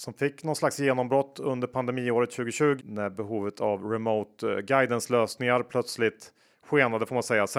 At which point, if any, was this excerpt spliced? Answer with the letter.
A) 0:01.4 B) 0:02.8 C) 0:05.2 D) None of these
B